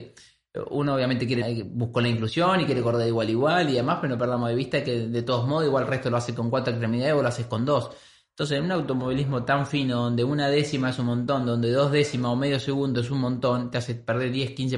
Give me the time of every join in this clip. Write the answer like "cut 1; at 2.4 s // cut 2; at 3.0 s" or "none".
cut 1; at 1.4 s